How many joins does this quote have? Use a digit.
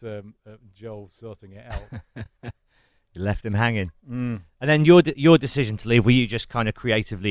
0